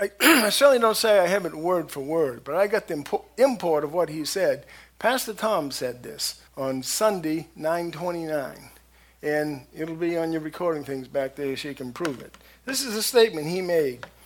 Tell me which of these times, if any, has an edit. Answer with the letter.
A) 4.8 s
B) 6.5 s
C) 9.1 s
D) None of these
B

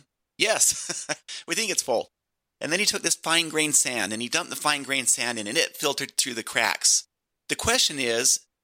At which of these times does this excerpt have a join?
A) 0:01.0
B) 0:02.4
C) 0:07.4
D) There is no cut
C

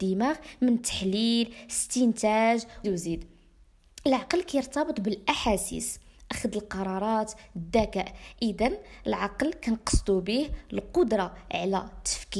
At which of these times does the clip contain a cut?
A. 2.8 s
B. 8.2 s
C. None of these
A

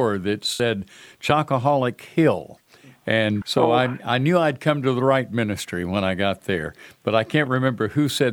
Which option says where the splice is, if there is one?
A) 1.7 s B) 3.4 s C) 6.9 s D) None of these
B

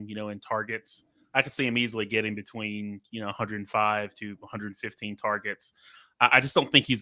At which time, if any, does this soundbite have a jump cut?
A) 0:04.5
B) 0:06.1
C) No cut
C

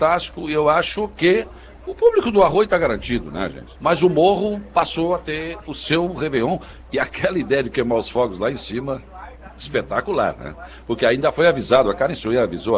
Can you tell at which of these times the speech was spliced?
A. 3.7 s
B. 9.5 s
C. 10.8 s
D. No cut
A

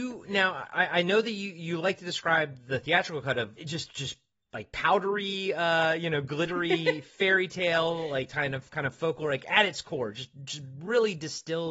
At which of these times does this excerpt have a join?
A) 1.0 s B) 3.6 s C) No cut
B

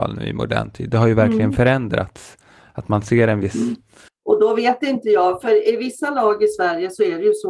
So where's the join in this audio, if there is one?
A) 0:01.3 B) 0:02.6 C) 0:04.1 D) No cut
C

